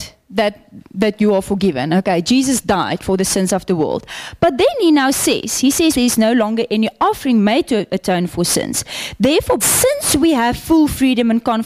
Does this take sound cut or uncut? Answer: cut